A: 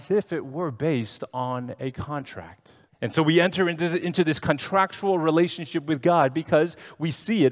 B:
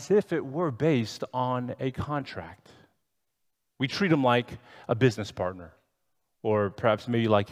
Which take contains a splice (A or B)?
A